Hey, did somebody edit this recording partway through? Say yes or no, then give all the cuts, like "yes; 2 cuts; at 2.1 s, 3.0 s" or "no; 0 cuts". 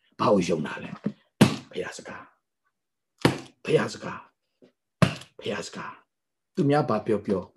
no; 0 cuts